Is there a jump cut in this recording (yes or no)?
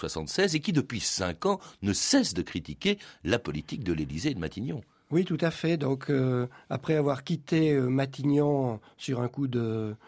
no